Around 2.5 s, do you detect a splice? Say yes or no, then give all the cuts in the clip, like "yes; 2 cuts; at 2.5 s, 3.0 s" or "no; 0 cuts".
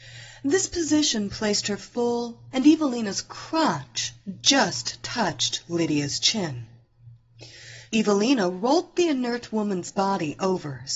yes; 2 cuts; at 2.5 s, 7.9 s